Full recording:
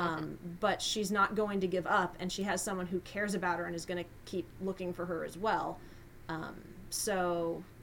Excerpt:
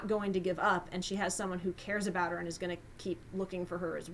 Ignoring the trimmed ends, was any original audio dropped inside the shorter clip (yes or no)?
no